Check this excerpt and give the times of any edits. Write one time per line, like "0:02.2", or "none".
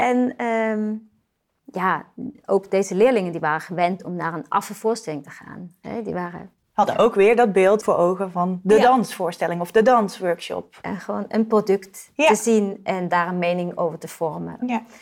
0:01.6